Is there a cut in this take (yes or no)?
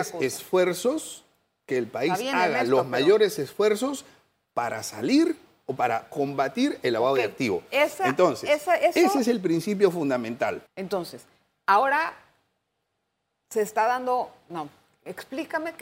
yes